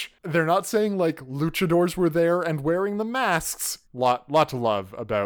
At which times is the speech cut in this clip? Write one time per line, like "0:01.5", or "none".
0:03.8